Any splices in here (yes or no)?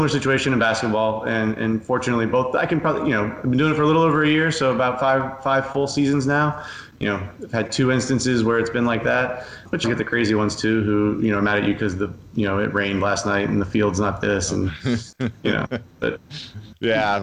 yes